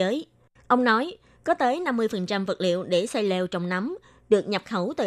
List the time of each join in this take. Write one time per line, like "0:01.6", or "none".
none